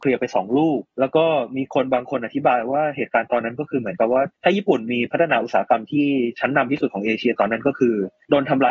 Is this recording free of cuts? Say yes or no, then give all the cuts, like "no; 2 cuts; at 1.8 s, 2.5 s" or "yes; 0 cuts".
yes; 0 cuts